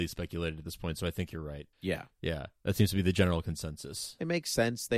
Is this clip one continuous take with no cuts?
no; 1 cut; at 1.7 s

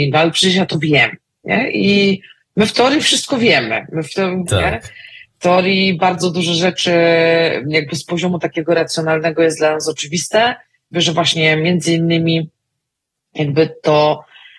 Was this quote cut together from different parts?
yes; 2 cuts; at 4.5 s, 10.9 s

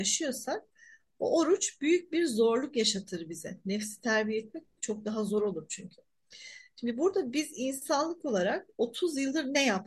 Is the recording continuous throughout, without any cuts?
yes; 0 cuts

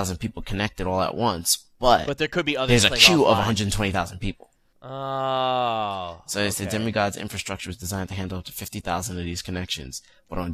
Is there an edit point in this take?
no; 0 cuts

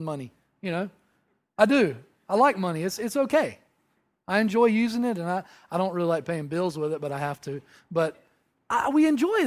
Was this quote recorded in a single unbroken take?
yes; 0 cuts

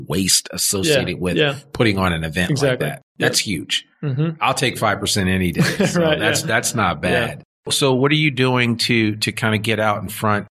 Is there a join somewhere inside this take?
no; 0 cuts

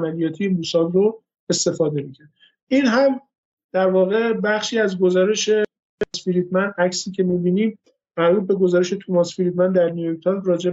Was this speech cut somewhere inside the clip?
no; 0 cuts

